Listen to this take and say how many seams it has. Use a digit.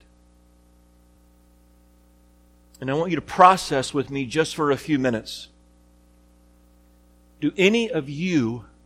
0